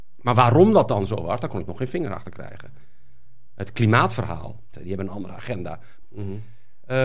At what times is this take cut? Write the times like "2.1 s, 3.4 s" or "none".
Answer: 4.7 s, 6.0 s